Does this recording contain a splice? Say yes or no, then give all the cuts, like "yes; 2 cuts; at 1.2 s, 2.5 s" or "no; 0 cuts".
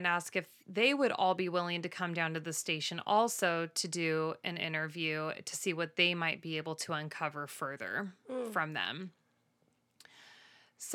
no; 0 cuts